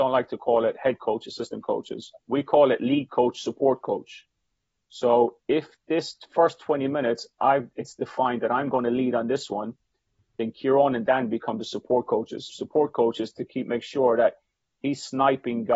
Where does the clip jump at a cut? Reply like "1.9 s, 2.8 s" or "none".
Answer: 2.2 s, 12.5 s